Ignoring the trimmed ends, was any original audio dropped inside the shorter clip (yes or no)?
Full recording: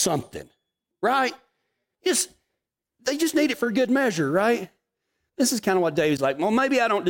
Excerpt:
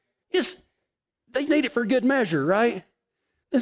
yes